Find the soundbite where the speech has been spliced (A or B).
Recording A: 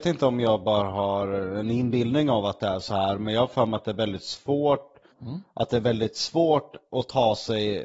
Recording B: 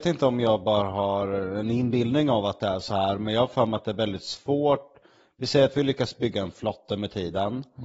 A